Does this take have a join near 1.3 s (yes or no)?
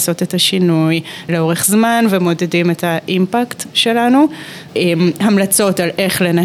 yes